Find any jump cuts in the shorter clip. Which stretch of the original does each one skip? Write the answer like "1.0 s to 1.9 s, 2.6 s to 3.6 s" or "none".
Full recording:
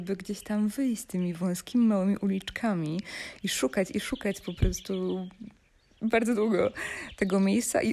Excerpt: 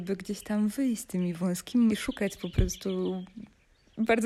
1.9 s to 3.9 s